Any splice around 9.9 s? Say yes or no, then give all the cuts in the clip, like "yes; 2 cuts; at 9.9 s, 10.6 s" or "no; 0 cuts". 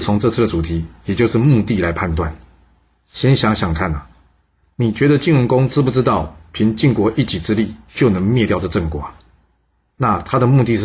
yes; 1 cut; at 9.9 s